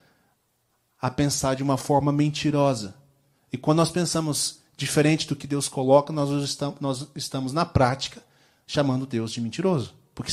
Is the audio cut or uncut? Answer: uncut